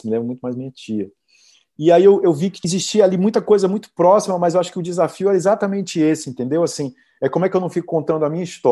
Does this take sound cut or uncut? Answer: uncut